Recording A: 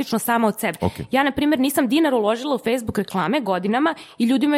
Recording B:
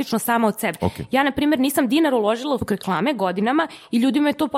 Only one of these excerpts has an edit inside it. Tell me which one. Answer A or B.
B